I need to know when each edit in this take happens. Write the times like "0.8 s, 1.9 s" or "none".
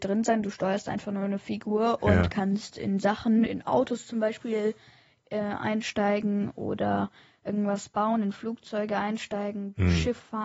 none